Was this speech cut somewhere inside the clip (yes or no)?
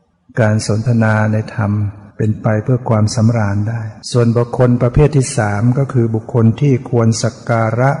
yes